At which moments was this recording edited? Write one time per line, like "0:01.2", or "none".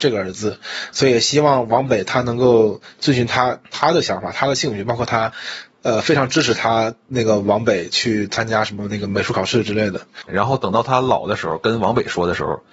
0:10.3